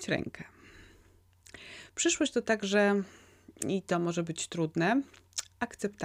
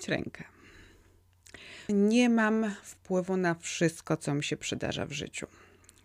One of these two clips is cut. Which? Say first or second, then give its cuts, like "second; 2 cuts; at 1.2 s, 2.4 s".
second; 1 cut; at 1.9 s